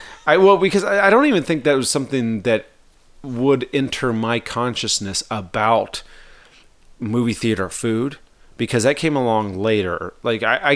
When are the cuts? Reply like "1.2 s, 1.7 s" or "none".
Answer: none